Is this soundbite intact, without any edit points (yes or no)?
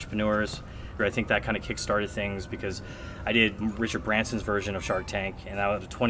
no